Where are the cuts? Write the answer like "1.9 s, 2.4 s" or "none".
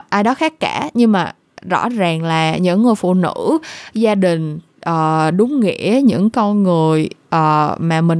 none